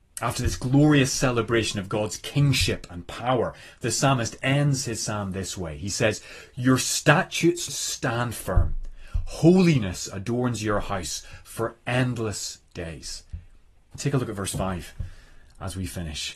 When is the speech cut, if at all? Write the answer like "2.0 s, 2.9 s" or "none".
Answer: 7.7 s, 13.9 s